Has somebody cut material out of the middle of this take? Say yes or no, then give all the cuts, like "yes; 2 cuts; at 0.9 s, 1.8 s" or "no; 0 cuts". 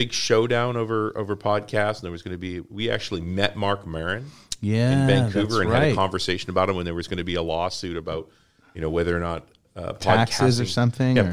no; 0 cuts